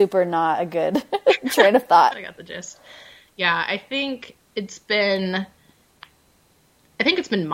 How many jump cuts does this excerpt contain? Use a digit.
2